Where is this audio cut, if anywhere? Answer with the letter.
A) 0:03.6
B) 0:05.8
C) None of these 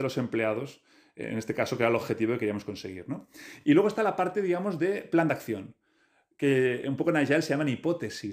C